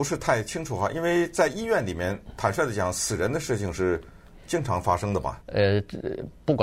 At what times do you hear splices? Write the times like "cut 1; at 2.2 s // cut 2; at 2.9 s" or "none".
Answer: cut 1; at 5.4 s